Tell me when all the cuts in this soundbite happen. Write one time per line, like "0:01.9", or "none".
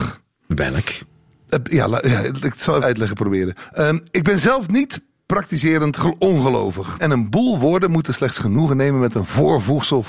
0:02.8
0:07.0